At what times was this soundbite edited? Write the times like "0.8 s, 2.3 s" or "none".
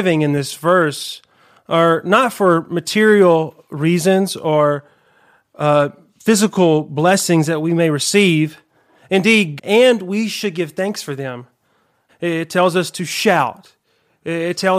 9.6 s, 12.1 s